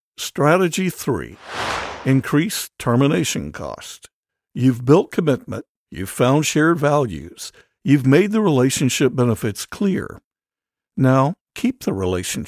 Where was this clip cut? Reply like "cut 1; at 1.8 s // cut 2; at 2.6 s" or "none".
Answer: cut 1; at 5.8 s